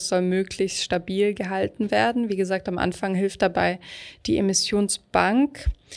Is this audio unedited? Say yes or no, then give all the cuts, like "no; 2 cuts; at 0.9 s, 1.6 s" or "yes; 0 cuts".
yes; 0 cuts